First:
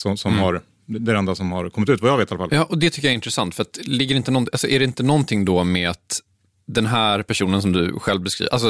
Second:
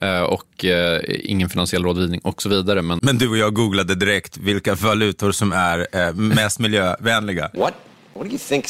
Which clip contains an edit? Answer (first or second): second